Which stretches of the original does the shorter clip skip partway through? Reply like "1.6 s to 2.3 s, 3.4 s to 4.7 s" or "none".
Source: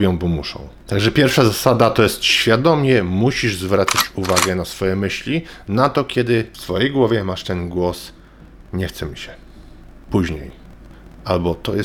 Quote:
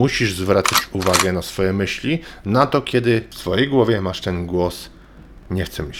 none